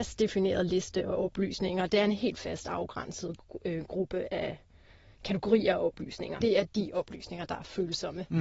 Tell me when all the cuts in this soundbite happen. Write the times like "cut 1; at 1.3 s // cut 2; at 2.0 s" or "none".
cut 1; at 1.9 s // cut 2; at 6.4 s